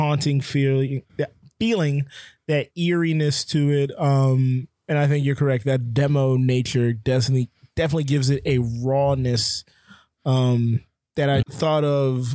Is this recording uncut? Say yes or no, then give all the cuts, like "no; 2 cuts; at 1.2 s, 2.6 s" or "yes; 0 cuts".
no; 2 cuts; at 1.1 s, 11.4 s